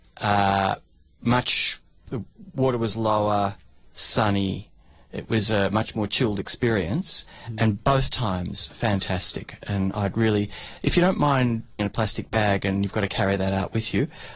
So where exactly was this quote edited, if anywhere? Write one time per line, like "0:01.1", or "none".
none